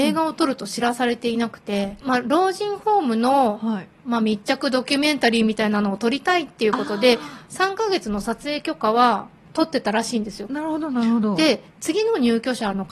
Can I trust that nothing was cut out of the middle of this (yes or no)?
no